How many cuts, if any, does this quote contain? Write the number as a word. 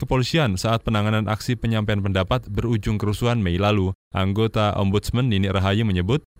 zero